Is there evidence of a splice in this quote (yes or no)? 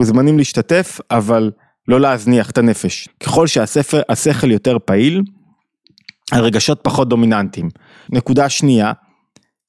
yes